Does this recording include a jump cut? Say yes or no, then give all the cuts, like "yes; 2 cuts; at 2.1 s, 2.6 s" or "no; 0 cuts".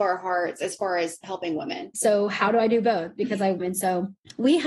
yes; 2 cuts; at 1.9 s, 3.6 s